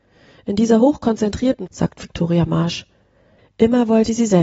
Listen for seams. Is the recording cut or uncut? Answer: cut